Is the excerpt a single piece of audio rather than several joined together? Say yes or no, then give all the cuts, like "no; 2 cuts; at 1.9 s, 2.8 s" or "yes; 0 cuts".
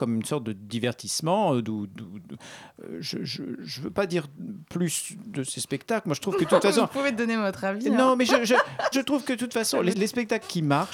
no; 2 cuts; at 8.9 s, 9.9 s